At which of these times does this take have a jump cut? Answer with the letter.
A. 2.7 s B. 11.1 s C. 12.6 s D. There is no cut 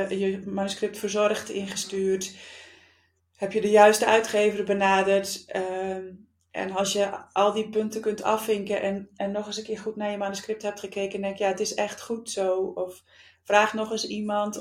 D